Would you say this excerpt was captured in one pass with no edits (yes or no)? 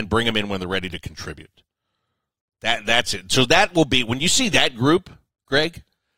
yes